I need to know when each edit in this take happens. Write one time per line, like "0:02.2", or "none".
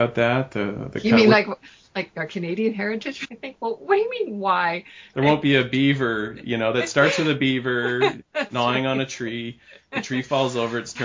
0:02.1
0:03.2
0:05.1